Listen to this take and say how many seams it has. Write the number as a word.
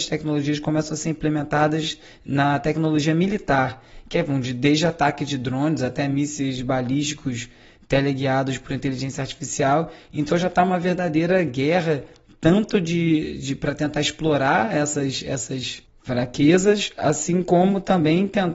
zero